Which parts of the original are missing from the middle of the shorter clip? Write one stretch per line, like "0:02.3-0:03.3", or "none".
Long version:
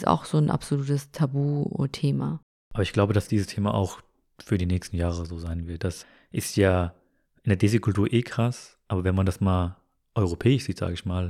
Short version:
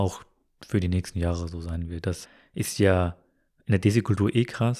none